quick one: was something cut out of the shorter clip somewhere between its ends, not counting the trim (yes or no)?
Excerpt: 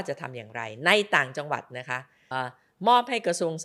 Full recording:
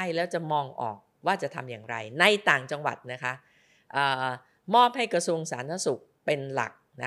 yes